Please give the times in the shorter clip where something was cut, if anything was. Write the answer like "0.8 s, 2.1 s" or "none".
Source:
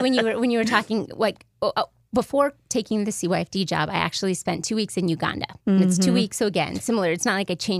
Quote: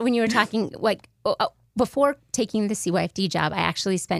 none